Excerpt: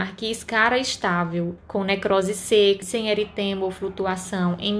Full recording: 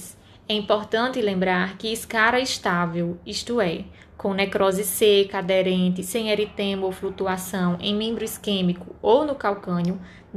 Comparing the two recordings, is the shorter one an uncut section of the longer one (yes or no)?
no